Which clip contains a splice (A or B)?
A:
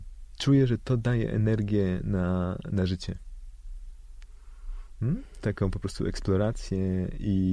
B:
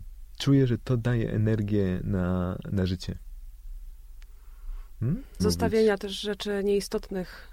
B